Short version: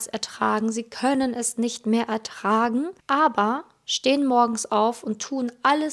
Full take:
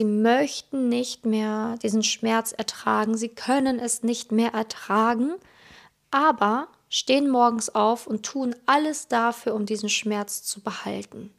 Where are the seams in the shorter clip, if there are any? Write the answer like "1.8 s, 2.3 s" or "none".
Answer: 3.0 s